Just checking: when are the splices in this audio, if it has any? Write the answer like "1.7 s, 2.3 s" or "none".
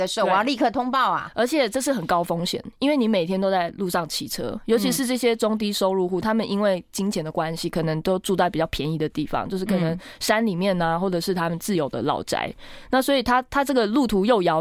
none